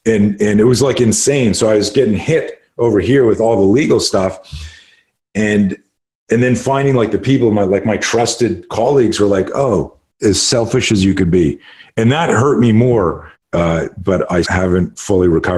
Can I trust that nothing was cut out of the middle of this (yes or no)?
no